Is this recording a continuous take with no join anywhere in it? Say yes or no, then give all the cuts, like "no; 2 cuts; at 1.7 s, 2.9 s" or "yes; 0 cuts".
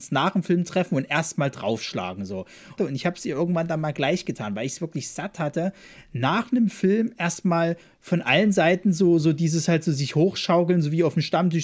no; 1 cut; at 2.8 s